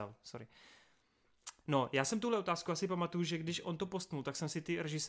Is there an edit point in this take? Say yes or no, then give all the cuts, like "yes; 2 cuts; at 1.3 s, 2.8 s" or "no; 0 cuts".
no; 0 cuts